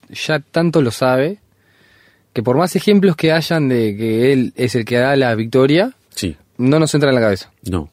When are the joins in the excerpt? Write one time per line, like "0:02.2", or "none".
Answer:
none